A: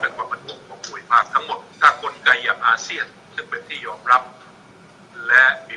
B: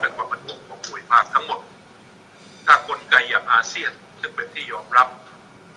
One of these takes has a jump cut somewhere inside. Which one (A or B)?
A